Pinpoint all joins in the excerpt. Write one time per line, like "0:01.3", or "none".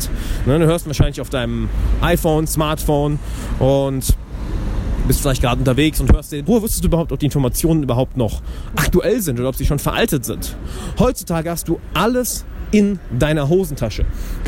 0:06.5